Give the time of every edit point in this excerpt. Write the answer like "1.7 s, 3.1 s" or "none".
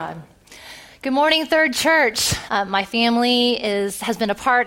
2.5 s